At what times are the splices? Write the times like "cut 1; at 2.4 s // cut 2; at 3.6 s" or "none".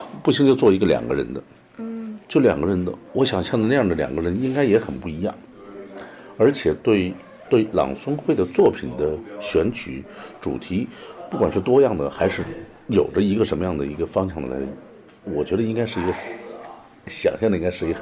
none